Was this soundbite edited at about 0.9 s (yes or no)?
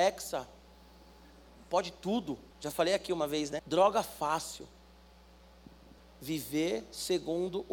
no